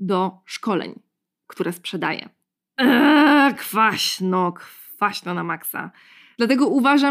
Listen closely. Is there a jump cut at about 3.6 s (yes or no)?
no